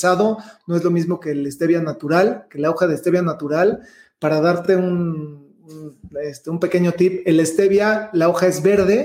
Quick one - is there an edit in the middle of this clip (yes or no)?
no